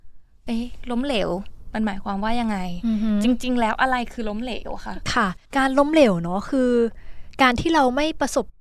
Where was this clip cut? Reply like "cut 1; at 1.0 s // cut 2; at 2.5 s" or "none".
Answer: cut 1; at 5.4 s